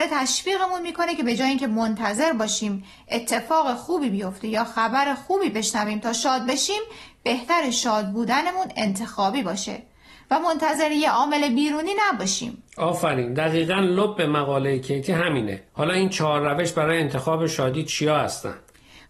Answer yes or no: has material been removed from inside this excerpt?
yes